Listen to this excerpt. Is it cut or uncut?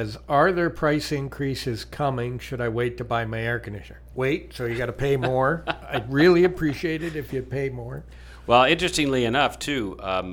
cut